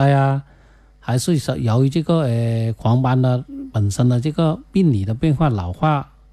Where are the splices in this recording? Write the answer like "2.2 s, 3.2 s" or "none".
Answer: none